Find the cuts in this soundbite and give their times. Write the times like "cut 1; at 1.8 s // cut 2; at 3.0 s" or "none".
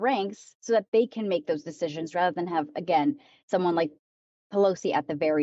none